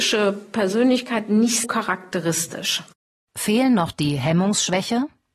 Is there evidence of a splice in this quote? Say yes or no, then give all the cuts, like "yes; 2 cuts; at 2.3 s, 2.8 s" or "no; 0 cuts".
yes; 1 cut; at 1.6 s